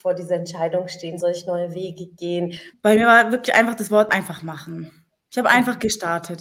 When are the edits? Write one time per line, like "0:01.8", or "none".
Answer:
0:01.2
0:02.7